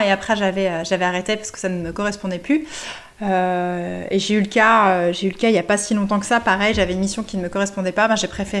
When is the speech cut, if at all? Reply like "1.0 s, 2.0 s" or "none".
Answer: 3.2 s